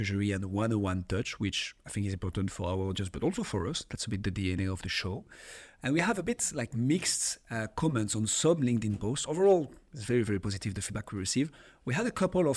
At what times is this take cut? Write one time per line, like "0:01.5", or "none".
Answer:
none